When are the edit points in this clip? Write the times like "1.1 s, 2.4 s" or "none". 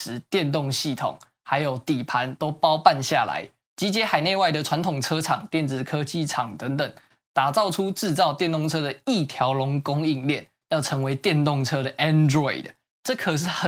10.6 s

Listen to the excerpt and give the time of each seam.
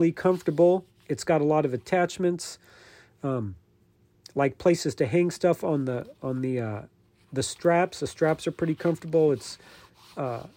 none

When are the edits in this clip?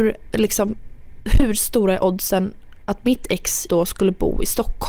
3.7 s

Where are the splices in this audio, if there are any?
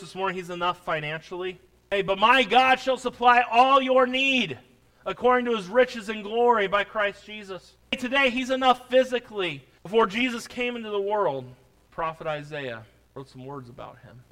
9.8 s

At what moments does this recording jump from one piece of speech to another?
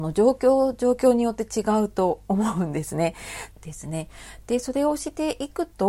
3.5 s

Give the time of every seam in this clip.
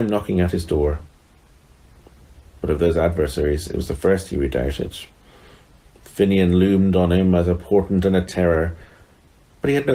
none

